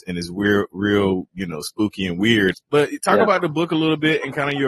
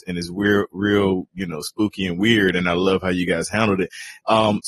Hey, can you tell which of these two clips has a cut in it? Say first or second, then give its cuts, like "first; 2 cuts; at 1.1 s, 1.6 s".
first; 1 cut; at 2.5 s